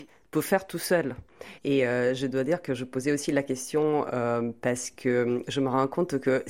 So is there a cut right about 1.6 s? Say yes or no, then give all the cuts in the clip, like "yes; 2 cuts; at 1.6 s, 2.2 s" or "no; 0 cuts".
yes; 1 cut; at 1.6 s